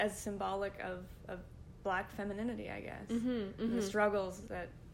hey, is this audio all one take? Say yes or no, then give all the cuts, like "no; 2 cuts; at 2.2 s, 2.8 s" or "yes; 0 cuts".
yes; 0 cuts